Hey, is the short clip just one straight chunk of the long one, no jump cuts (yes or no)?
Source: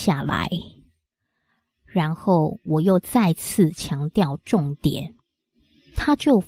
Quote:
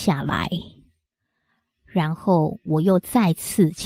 yes